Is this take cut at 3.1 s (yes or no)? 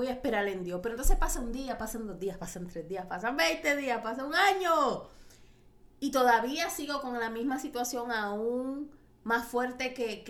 yes